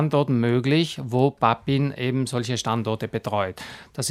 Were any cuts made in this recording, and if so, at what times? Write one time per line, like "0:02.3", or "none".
none